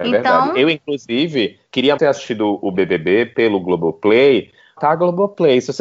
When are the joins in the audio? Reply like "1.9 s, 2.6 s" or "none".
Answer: 2.0 s, 4.8 s